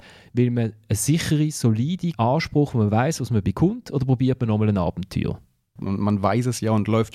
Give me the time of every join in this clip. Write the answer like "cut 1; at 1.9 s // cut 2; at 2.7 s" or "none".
cut 1; at 2.1 s // cut 2; at 5.8 s